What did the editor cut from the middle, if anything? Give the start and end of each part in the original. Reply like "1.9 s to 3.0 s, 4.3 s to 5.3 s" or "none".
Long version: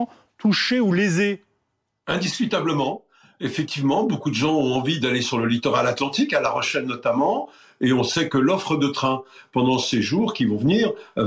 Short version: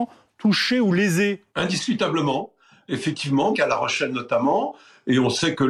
1.5 s to 2.0 s, 4.0 s to 6.3 s